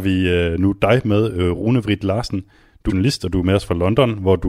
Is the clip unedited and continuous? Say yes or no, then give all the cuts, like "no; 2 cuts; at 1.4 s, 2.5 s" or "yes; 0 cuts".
no; 1 cut; at 2.9 s